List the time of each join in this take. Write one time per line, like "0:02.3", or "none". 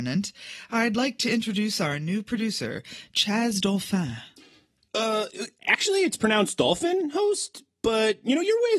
none